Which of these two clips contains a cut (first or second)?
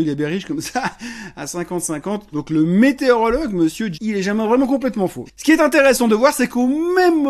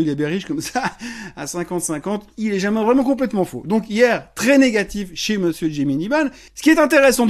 first